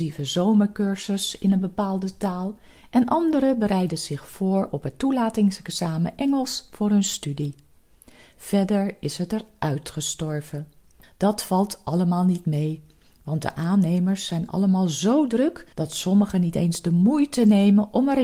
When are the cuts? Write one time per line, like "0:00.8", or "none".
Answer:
0:11.0